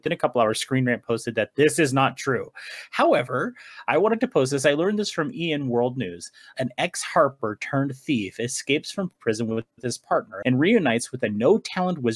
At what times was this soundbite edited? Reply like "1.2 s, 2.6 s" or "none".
6.5 s, 10.4 s